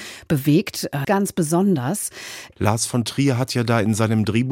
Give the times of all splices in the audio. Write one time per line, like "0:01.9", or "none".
0:01.0
0:02.5